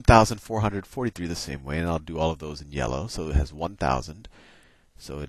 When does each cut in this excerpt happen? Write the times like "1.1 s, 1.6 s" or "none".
none